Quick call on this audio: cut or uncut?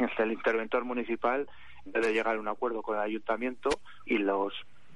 cut